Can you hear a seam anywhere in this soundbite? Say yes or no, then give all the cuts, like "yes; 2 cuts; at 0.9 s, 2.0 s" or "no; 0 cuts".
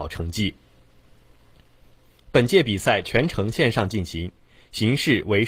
no; 0 cuts